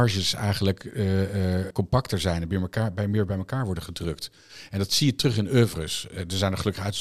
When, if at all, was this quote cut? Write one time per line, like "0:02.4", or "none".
0:01.7